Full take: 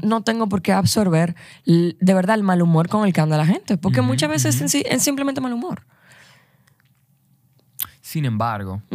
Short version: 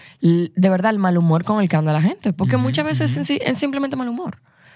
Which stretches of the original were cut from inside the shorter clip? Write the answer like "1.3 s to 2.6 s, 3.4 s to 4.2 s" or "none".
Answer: none